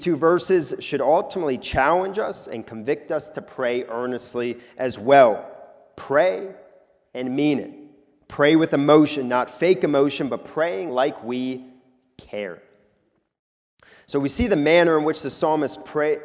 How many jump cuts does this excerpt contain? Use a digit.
0